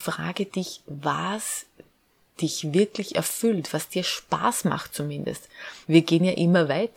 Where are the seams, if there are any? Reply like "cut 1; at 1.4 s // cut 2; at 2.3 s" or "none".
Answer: cut 1; at 5.8 s